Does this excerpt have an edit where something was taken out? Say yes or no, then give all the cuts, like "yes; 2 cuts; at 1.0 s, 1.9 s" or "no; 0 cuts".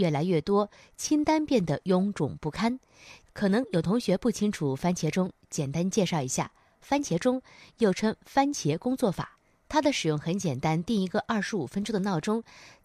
yes; 1 cut; at 3.3 s